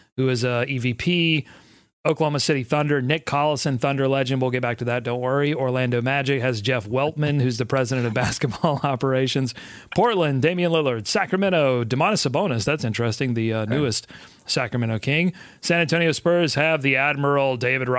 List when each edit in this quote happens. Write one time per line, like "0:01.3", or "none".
none